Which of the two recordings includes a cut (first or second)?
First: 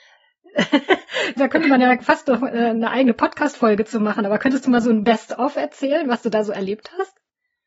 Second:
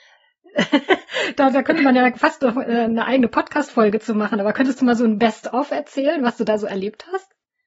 first